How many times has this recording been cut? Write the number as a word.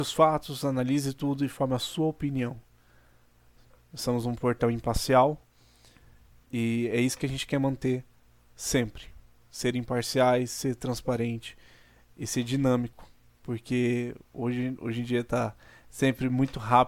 zero